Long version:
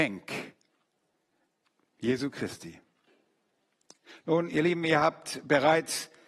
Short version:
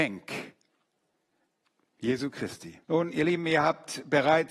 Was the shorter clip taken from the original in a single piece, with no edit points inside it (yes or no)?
no